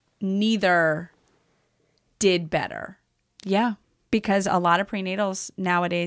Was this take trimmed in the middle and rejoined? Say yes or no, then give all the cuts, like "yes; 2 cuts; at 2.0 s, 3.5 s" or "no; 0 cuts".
yes; 1 cut; at 3.3 s